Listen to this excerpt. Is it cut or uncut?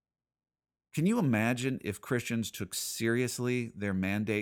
uncut